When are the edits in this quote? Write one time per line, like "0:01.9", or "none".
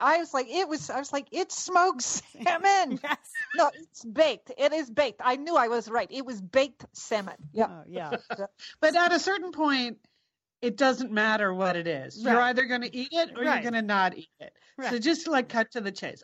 none

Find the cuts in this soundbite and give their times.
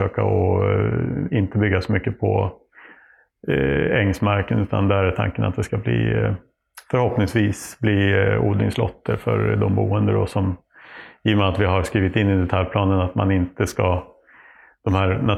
none

